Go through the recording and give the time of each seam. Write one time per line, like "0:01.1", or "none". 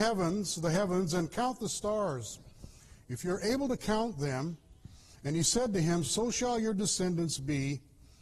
none